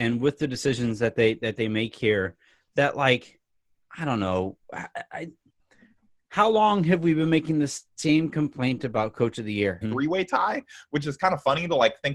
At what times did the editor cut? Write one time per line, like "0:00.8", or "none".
0:09.8